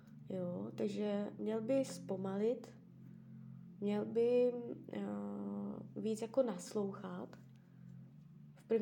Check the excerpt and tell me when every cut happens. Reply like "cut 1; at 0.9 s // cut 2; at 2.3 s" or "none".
cut 1; at 1.4 s